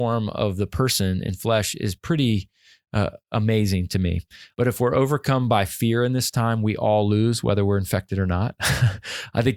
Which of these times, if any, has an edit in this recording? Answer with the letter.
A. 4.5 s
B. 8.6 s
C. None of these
A